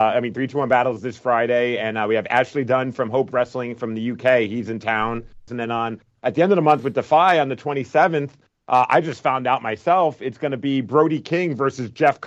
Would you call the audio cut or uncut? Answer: cut